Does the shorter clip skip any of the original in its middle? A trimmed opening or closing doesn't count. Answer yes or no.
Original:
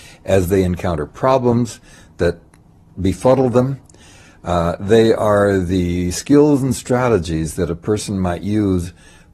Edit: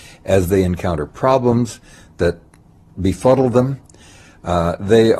no